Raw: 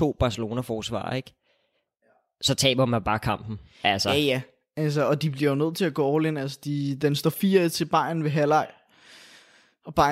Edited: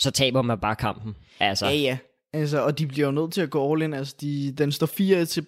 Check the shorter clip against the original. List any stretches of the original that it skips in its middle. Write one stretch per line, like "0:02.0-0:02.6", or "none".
none